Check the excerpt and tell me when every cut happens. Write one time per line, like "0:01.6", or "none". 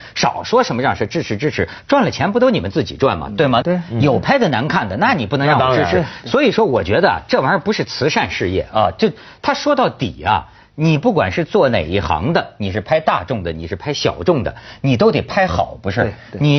0:03.6